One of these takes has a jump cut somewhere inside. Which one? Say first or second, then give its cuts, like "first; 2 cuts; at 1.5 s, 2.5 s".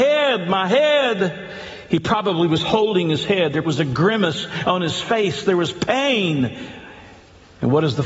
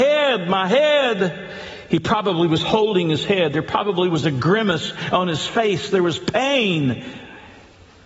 first; 1 cut; at 3.6 s